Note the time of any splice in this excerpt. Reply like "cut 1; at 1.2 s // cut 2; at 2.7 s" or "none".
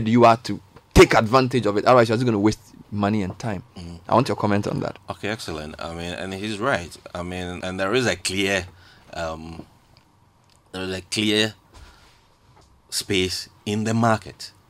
cut 1; at 7.6 s